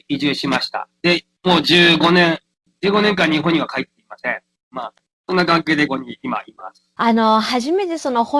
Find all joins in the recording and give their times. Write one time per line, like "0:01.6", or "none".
0:05.9
0:07.0